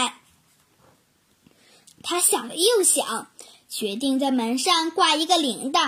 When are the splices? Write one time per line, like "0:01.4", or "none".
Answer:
0:01.9